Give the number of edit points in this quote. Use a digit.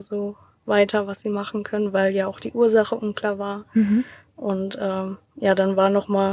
0